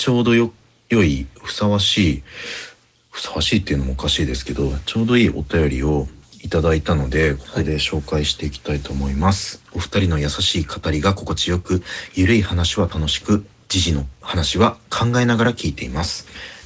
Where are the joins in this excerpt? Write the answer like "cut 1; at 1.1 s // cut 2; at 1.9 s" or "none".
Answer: cut 1; at 9.6 s